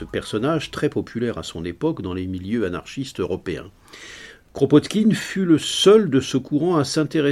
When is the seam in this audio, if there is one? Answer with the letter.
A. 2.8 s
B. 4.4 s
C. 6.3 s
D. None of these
D